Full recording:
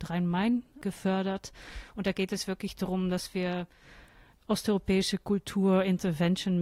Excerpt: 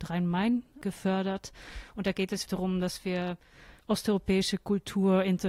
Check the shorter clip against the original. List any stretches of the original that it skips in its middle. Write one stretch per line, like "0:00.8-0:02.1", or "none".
0:02.5-0:02.7
0:04.1-0:04.4

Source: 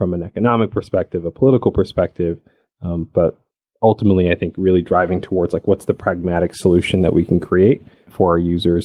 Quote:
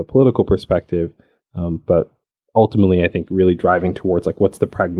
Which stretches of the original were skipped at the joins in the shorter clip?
none

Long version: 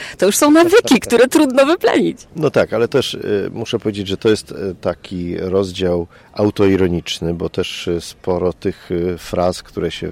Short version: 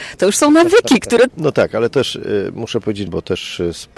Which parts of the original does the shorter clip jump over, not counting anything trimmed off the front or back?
0:01.3-0:02.3
0:04.1-0:07.3

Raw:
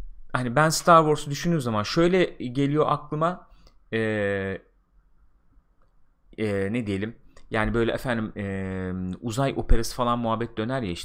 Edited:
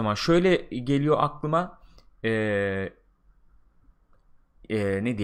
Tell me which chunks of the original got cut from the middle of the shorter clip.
none

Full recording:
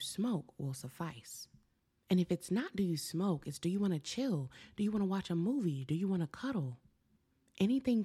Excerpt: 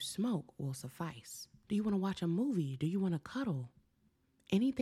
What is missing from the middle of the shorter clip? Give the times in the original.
0:01.6-0:04.7

